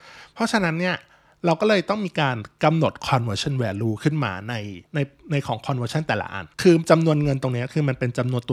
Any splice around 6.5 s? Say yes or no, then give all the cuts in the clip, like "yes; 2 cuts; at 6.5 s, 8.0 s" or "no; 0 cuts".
yes; 2 cuts; at 4.9 s, 6.5 s